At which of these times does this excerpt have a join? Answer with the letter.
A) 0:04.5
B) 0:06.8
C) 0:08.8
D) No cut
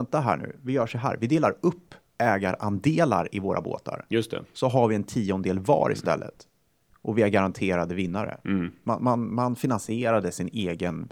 C